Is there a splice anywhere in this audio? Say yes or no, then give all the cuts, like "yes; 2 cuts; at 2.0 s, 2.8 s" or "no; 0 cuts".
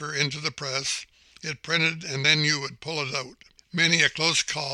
no; 0 cuts